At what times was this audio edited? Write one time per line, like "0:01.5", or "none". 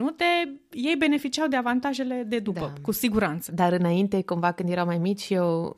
0:03.5